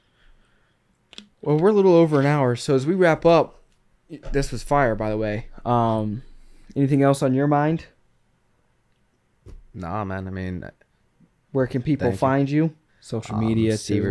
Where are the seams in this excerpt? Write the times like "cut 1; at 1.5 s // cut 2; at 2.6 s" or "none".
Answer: cut 1; at 12.9 s

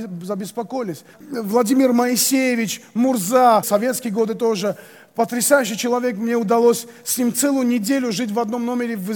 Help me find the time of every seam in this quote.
cut 1; at 1.1 s // cut 2; at 3.6 s

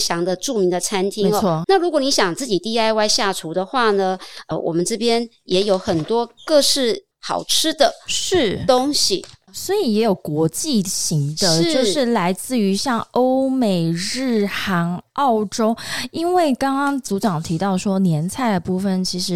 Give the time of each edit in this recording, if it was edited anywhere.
cut 1; at 1.6 s

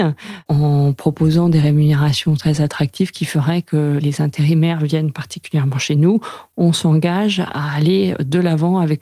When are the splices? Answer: cut 1; at 4.0 s

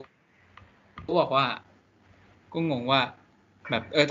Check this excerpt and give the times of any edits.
cut 1; at 2.3 s

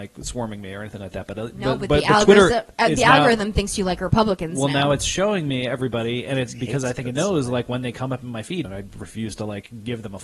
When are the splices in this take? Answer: cut 1; at 8.6 s

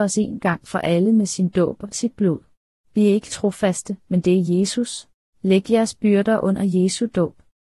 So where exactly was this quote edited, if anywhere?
cut 1; at 2.8 s // cut 2; at 5.2 s

